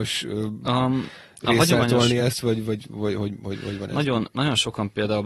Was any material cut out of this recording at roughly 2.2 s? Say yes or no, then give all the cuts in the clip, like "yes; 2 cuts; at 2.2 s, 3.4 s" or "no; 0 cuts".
no; 0 cuts